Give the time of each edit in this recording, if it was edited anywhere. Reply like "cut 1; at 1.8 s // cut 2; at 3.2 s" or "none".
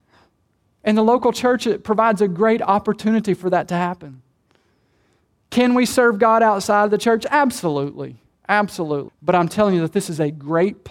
cut 1; at 9.1 s